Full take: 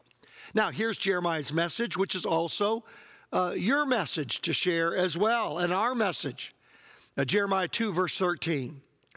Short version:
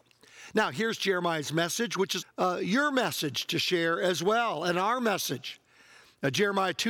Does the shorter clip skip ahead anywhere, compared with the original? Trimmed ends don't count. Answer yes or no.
yes